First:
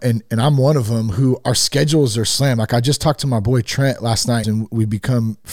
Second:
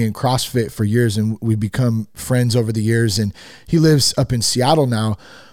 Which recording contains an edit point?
first; 1 cut; at 4.4 s

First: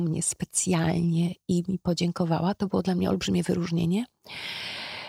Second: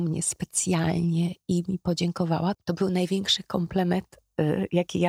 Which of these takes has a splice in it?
second; 1 cut; at 2.5 s

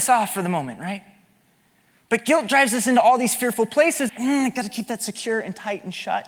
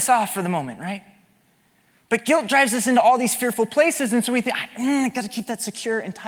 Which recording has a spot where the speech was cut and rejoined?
first; 1 cut; at 4.1 s

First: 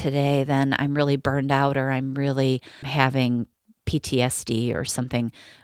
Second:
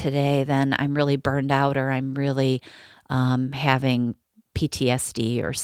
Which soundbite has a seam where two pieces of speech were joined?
first; 1 cut; at 2.8 s

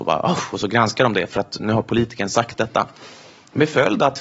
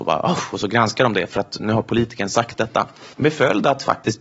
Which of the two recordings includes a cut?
second; 1 cut; at 3.1 s

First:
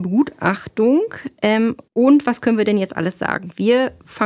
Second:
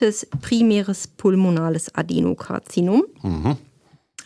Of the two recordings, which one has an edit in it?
first; 1 cut; at 1.9 s

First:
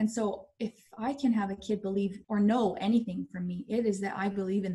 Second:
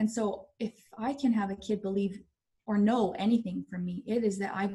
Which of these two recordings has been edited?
first; 1 cut; at 2.2 s

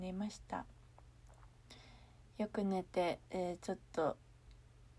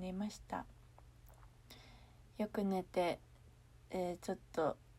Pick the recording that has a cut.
first; 1 cut; at 3.3 s

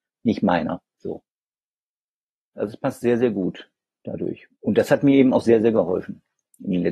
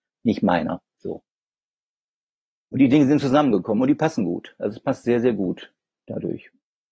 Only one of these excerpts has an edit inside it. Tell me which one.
first; 2 cuts; at 2.5 s, 4.6 s

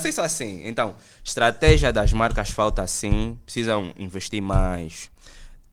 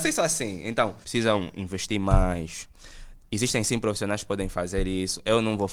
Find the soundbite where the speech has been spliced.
second; 1 cut; at 1.0 s

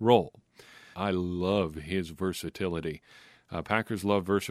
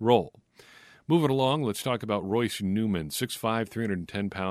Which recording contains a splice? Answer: first; 1 cut; at 0.9 s

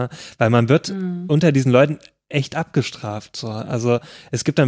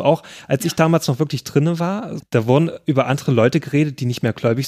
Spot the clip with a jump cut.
second; 1 cut; at 2.2 s

